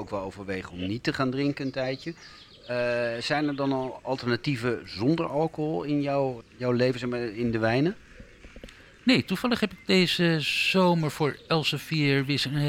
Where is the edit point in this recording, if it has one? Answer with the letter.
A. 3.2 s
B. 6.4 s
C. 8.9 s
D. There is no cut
B